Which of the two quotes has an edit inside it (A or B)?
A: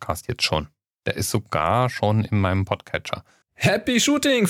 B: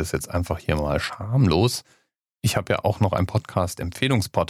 A